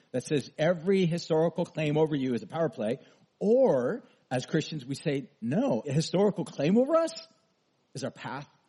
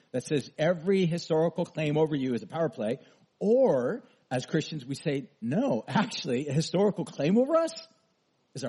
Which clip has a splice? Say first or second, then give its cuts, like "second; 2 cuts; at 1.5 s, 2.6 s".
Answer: first; 1 cut; at 5.8 s